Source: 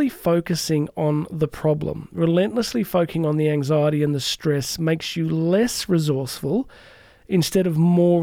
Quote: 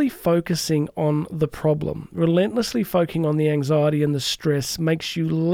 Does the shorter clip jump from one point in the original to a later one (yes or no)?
no